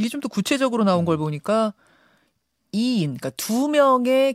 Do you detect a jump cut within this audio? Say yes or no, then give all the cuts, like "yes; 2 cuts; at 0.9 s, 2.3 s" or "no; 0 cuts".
no; 0 cuts